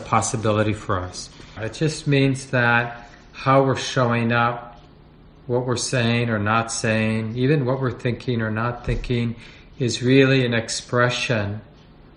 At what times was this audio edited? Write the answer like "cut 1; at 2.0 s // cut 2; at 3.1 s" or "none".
cut 1; at 1.6 s